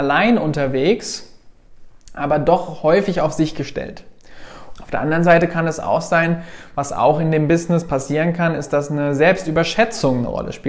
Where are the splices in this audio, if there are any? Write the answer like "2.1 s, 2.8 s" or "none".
4.7 s